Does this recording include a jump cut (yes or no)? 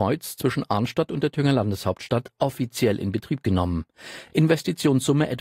no